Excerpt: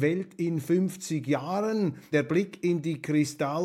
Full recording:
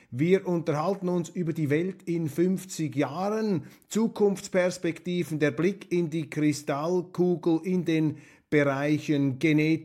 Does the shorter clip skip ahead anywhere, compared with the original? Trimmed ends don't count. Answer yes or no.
yes